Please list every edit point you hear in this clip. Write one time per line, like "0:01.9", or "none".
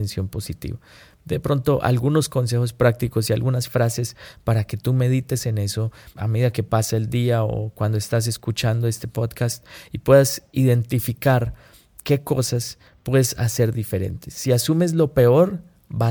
0:06.1